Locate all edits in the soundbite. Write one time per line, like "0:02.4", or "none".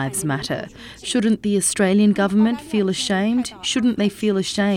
0:01.0